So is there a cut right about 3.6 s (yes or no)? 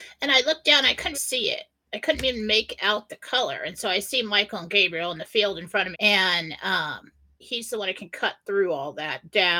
no